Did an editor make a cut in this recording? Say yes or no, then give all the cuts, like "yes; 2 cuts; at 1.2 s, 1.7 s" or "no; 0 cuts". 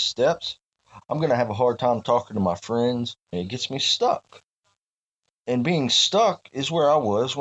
yes; 2 cuts; at 1.0 s, 3.3 s